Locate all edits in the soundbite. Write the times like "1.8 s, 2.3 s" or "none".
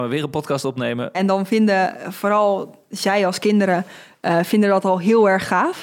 1.1 s